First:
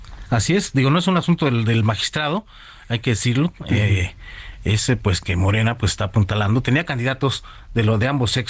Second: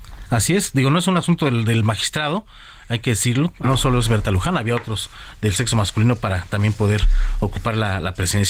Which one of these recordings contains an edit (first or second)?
second